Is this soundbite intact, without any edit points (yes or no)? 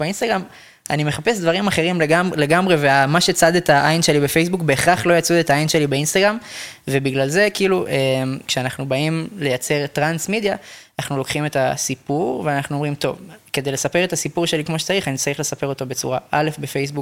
yes